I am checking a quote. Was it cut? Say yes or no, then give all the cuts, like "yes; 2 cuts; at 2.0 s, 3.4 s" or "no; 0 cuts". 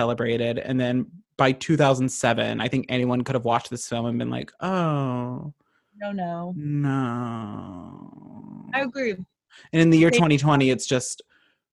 no; 0 cuts